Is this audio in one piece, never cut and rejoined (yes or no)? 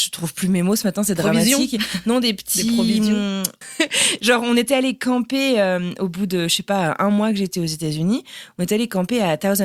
no